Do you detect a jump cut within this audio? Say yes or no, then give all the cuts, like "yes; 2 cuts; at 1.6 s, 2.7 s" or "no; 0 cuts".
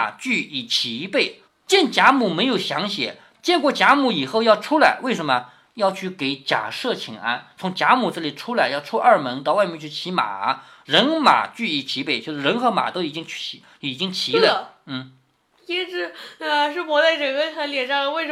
yes; 1 cut; at 3.4 s